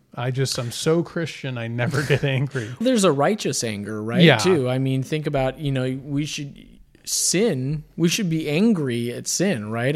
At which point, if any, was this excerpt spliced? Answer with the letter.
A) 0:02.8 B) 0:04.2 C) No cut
A